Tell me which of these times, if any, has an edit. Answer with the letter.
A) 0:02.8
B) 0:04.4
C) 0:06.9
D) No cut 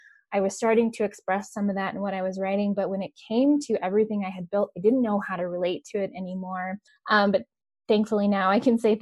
C